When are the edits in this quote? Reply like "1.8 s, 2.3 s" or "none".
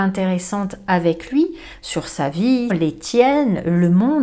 2.7 s